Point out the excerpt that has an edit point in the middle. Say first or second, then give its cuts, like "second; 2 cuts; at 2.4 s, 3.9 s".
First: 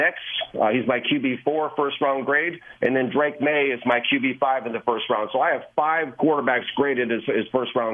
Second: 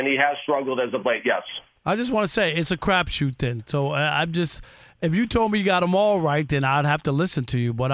second; 1 cut; at 1.8 s